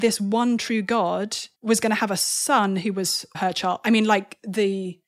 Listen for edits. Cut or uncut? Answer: cut